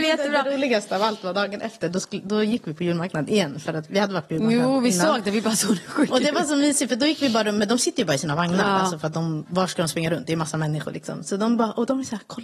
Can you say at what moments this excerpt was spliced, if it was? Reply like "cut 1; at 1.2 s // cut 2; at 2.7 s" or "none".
cut 1; at 3.9 s